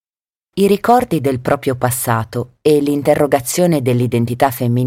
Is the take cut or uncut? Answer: uncut